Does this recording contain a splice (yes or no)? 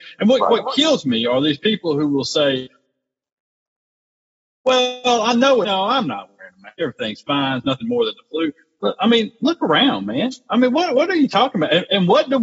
no